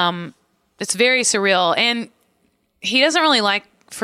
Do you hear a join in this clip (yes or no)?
no